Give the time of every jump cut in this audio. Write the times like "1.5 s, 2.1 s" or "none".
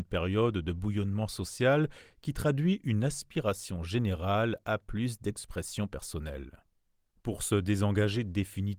none